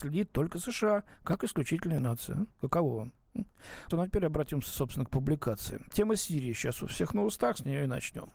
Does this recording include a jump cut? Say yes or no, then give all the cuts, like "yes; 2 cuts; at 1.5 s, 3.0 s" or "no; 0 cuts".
yes; 1 cut; at 3.9 s